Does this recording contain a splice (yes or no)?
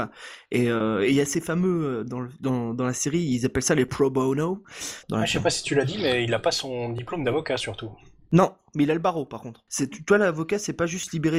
yes